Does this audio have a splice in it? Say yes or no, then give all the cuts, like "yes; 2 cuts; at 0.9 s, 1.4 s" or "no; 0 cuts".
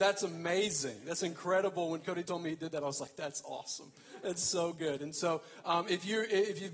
no; 0 cuts